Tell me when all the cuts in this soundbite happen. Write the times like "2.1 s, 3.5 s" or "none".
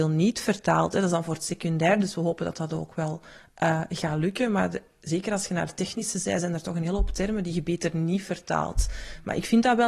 none